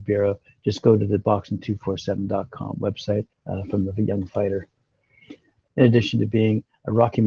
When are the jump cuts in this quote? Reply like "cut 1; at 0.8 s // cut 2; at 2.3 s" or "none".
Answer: cut 1; at 3.3 s // cut 2; at 5.7 s